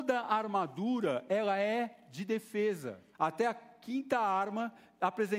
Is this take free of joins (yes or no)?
no